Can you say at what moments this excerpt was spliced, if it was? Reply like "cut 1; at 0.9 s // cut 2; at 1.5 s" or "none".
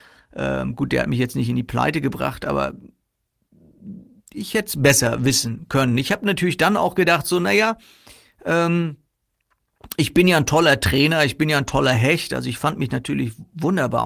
none